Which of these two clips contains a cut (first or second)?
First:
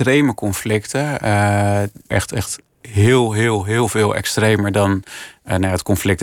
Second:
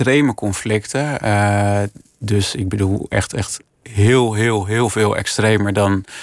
first